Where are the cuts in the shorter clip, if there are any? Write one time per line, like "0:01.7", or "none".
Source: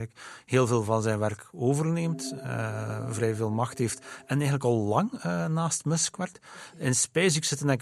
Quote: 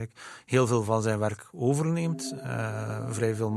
none